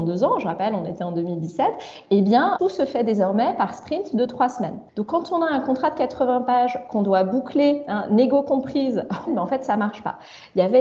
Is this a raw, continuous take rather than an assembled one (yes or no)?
no